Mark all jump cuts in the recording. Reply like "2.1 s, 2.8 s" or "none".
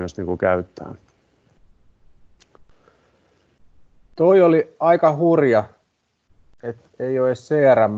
none